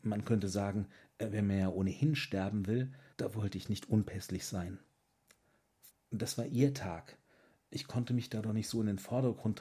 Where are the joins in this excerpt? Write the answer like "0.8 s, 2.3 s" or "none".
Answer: 3.1 s, 5.9 s